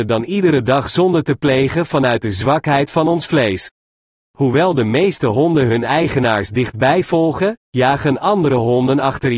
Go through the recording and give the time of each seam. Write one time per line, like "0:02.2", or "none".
0:04.2

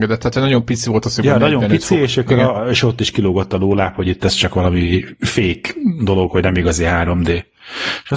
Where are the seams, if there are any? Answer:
none

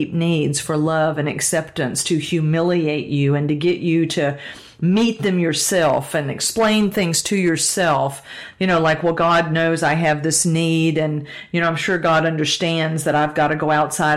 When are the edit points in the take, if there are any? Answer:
none

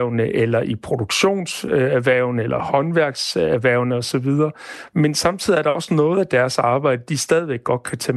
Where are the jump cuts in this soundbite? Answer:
none

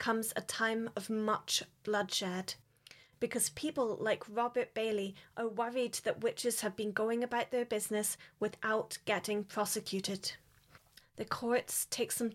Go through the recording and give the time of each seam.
0:11.0

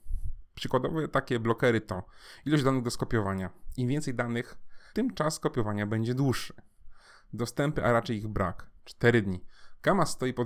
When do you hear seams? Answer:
0:04.9
0:08.8

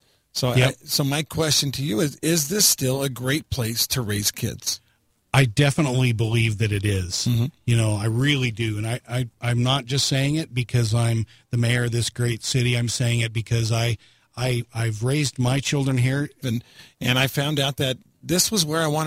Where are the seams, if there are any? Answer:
0:16.4

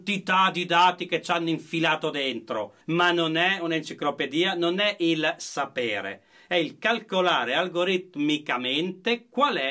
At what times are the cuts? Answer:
0:02.8

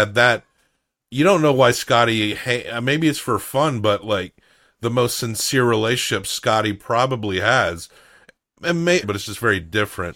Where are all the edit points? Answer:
0:09.0

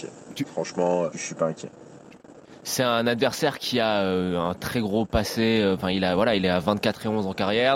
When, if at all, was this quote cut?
0:01.1

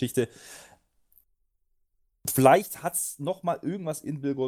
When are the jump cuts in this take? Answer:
none

